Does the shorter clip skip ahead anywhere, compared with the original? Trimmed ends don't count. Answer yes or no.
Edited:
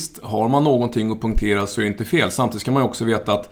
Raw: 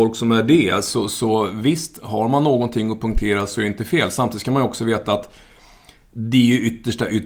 no